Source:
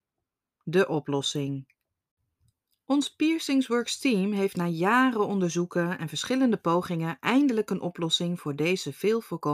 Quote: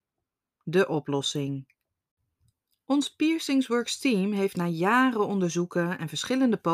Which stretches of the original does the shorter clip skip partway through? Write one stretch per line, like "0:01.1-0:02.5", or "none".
none